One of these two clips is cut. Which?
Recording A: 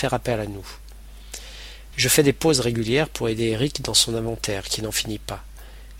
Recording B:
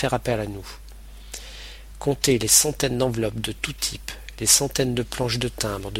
B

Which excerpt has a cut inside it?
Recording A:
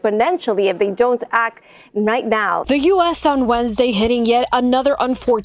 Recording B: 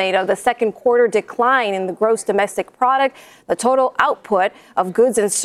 A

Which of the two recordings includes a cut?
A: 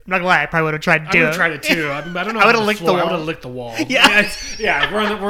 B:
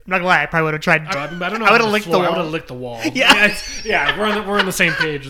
B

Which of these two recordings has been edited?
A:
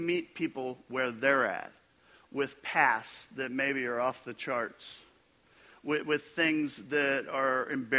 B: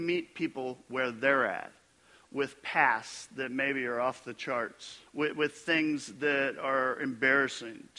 B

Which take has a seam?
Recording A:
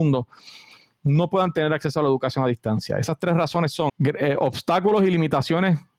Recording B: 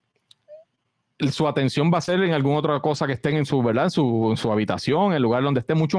A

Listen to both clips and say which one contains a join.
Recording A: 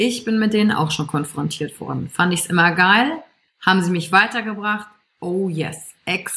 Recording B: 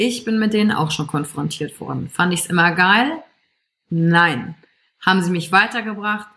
A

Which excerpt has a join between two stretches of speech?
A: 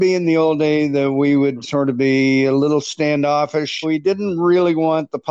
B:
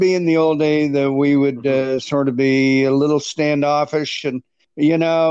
A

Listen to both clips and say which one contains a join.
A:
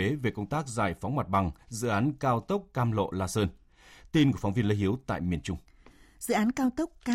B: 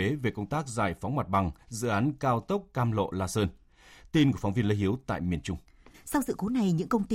B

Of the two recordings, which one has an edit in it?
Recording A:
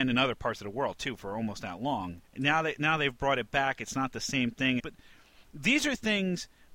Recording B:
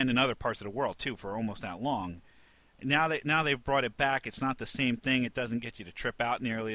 A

